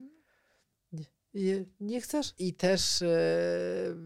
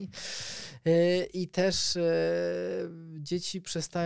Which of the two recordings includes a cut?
first; 1 cut; at 2.4 s

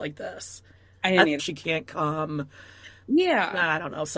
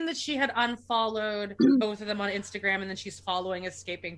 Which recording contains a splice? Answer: first; 1 cut; at 1.4 s

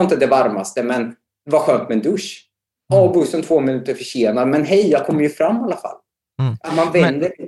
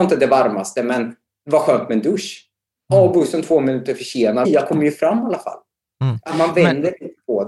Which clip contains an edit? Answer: second; 1 cut; at 4.4 s

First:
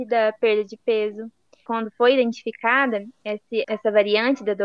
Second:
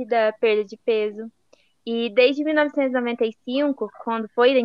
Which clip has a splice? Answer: first; 2 cuts; at 1.7 s, 3.6 s

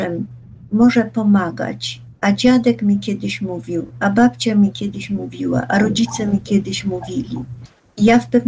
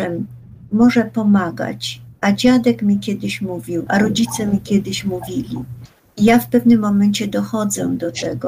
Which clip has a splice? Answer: second; 1 cut; at 3.9 s

